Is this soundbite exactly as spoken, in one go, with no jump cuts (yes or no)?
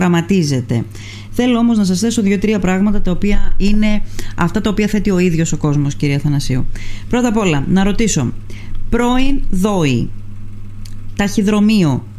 no